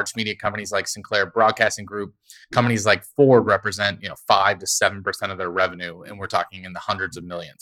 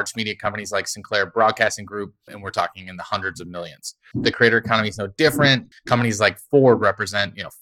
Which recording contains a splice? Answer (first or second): second